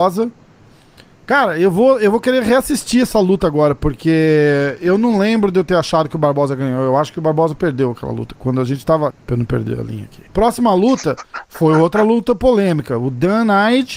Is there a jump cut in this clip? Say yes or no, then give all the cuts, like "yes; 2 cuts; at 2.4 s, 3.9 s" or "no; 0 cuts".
yes; 2 cuts; at 9.1 s, 10.3 s